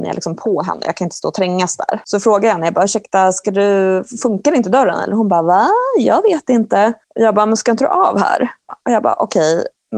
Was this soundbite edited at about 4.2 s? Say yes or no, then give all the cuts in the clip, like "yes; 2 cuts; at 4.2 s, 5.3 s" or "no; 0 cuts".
no; 2 cuts; at 7.0 s, 8.7 s